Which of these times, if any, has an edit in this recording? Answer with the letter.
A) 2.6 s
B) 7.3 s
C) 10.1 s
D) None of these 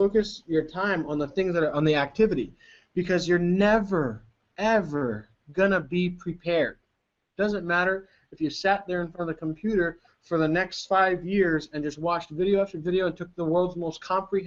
B